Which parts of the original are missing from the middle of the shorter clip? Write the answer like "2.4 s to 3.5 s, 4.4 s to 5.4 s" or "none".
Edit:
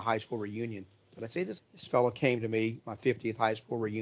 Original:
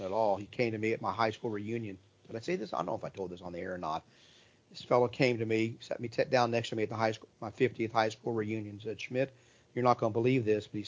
2.7 s to 4.6 s, 5.8 s to 7.3 s